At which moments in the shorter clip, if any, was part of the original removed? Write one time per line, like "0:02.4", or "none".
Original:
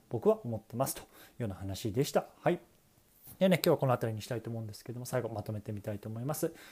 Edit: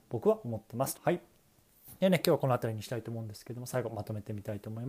0:00.9